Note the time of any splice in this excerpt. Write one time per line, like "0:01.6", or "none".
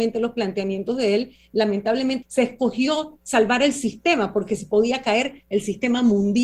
0:02.2